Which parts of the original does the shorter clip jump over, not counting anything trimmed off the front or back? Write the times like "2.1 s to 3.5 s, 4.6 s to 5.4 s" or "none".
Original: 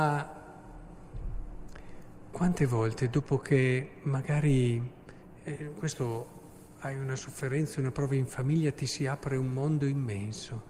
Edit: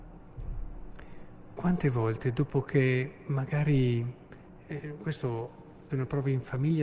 6.7 s to 7.7 s